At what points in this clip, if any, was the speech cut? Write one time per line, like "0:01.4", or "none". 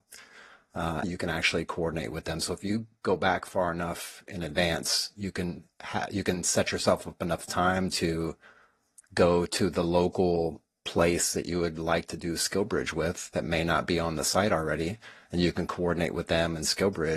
0:01.0